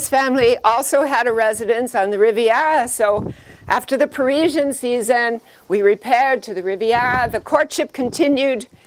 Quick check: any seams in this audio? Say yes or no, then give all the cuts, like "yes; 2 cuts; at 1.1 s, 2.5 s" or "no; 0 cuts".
no; 0 cuts